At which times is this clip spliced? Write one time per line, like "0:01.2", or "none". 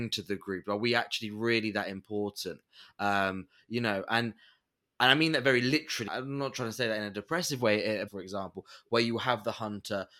0:06.1
0:08.1